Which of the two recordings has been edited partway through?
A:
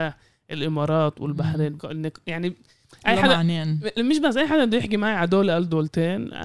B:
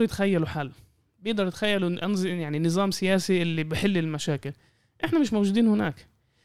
A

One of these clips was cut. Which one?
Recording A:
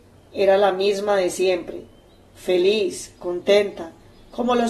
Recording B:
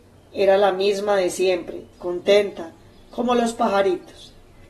B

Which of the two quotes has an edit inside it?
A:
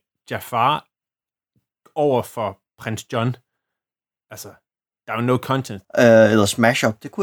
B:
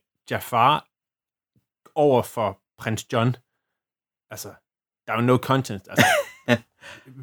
A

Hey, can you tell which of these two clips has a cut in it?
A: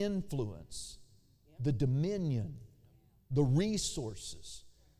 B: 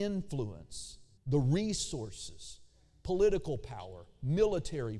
B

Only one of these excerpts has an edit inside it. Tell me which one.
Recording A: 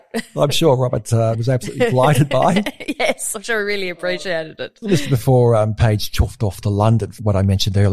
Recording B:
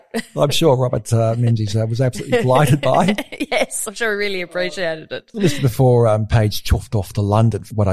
A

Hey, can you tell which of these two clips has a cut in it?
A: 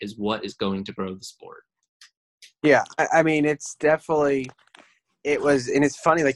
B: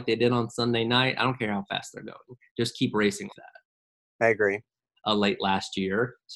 B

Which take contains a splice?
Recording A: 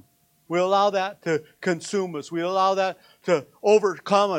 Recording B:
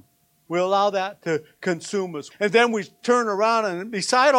B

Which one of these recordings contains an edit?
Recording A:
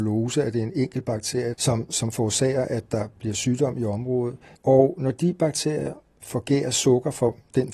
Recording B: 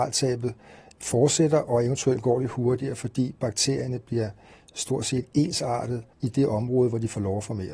A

